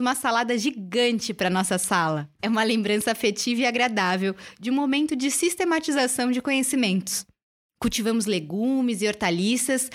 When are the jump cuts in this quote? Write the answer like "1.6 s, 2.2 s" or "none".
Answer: 2.4 s, 7.7 s